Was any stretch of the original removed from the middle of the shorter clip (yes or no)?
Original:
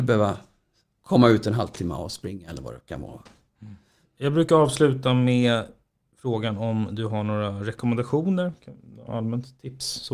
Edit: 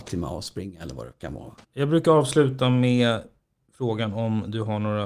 yes